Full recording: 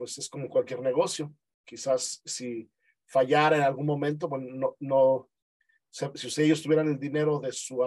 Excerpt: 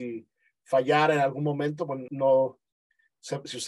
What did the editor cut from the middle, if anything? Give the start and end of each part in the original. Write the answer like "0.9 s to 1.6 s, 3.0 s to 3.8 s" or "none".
4.5 s to 4.8 s